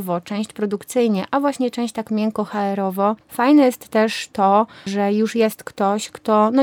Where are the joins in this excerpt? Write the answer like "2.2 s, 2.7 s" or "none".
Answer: 3.2 s, 4.9 s